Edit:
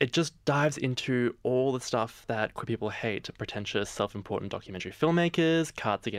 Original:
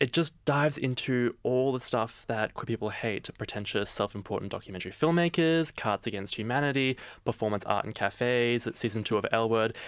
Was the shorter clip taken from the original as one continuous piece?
yes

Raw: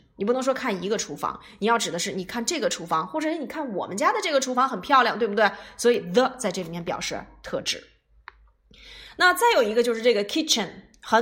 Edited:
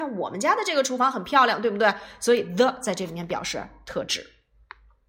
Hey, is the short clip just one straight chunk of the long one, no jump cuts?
yes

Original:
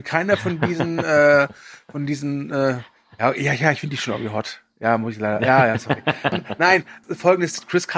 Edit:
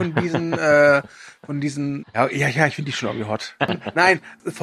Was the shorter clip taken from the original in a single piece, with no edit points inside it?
no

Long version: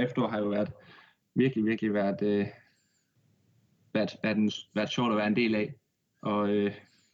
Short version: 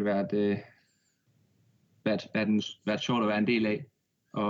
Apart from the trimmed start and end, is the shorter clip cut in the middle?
no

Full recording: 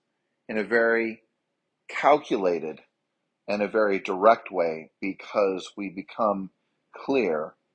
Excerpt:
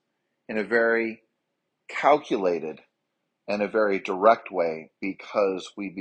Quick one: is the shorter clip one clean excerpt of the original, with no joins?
yes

